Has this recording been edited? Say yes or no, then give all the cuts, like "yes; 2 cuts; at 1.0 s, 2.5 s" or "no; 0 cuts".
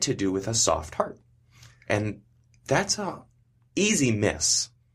yes; 1 cut; at 3.7 s